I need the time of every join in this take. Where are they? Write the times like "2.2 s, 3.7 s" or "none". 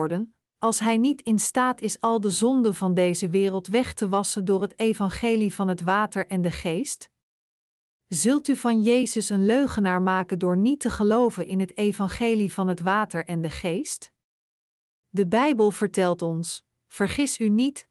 none